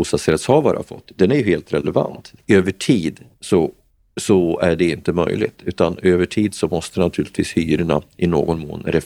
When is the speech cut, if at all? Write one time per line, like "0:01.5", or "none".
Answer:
0:02.4